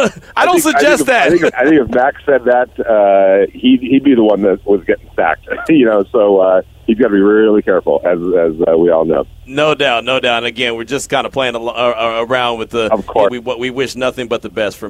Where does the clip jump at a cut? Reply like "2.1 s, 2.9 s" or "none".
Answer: 1.5 s, 13.3 s